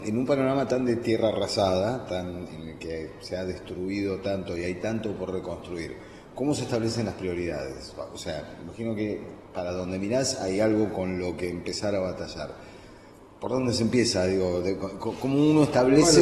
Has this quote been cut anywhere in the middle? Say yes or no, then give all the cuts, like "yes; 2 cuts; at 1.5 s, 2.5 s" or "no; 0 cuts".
no; 0 cuts